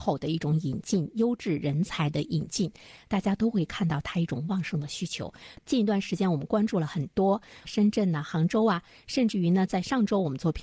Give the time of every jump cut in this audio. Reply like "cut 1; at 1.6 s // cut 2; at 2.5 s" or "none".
cut 1; at 5.5 s // cut 2; at 7.6 s